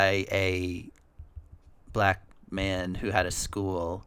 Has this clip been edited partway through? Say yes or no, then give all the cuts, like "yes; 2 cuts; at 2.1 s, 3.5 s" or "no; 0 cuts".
no; 0 cuts